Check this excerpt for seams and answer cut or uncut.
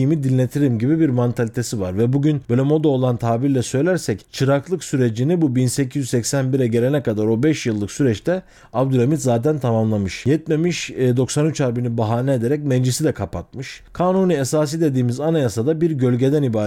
uncut